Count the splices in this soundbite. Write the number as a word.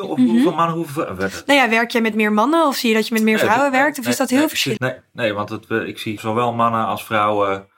two